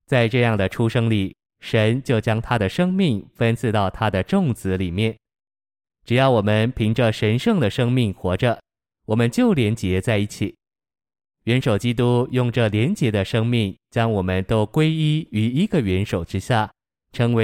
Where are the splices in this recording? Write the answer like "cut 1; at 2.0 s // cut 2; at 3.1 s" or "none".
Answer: cut 1; at 5.8 s